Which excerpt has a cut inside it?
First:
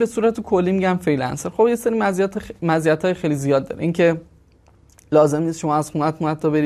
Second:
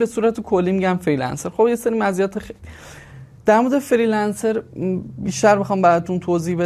second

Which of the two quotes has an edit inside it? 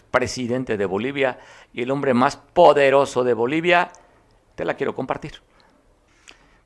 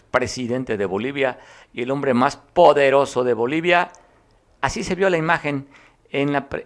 first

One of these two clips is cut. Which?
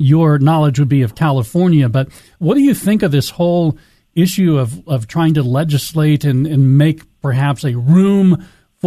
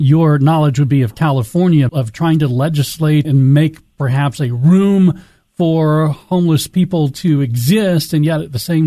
second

